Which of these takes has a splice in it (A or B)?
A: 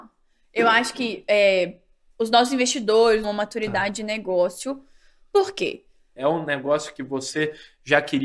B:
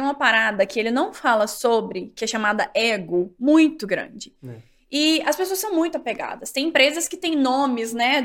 A